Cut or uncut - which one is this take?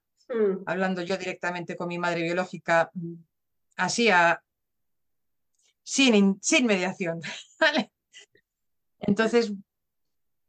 uncut